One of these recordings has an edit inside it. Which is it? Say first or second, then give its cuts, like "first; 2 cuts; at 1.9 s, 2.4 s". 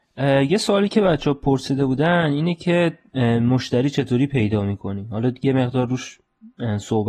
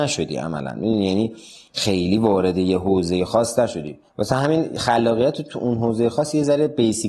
second; 1 cut; at 4.1 s